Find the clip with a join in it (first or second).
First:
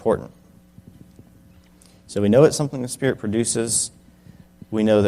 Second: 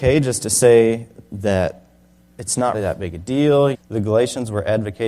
second